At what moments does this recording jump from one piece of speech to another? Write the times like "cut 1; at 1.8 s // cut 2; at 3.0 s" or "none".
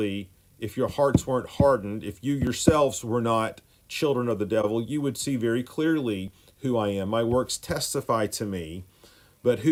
none